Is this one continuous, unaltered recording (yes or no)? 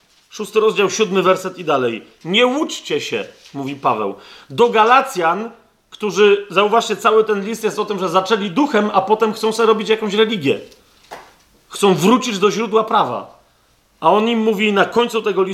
yes